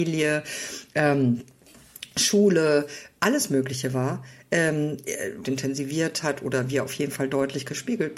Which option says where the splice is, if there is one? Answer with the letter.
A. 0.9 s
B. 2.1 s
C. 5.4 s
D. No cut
C